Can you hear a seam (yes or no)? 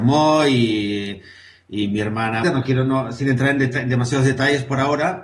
yes